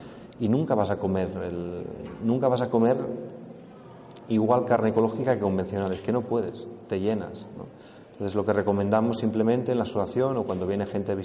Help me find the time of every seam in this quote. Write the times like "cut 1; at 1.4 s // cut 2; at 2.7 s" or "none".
none